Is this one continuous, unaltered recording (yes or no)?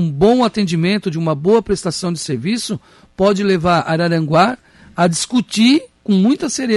yes